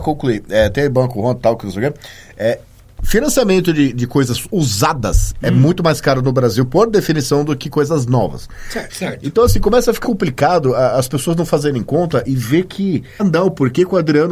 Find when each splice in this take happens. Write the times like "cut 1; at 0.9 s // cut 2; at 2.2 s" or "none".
cut 1; at 8.9 s // cut 2; at 10.0 s // cut 3; at 13.2 s

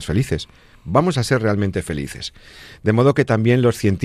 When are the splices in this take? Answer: none

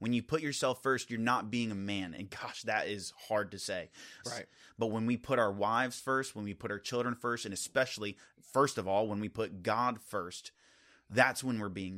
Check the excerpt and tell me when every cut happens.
cut 1; at 4.2 s

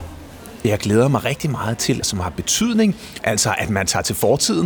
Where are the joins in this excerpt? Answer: cut 1; at 2.0 s // cut 2; at 3.2 s

